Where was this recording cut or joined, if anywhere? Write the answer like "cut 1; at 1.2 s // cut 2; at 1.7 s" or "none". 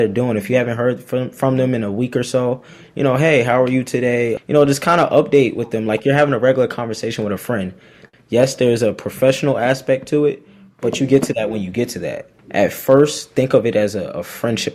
cut 1; at 4.4 s // cut 2; at 8.1 s // cut 3; at 12.4 s